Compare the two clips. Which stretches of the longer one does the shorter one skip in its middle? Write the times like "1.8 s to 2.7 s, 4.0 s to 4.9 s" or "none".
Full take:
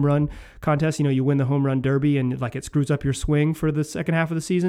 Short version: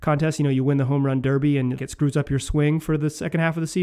2.4 s to 2.5 s